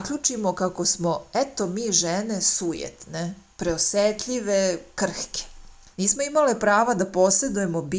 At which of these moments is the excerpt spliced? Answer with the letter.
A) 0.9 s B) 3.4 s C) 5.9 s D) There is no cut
C